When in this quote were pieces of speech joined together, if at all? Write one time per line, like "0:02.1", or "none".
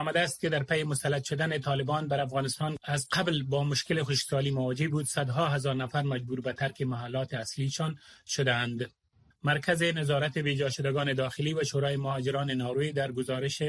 0:09.3